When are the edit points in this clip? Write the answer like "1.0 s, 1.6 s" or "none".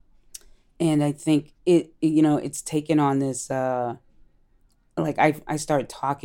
1.6 s